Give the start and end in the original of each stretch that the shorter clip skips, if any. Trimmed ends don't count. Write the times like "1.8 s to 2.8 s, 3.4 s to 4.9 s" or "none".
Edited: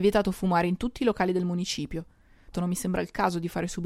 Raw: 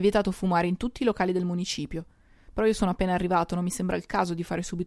2.5 s to 3.5 s